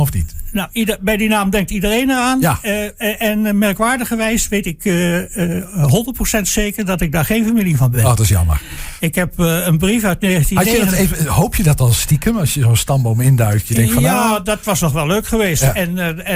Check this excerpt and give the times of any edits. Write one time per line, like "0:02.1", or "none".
none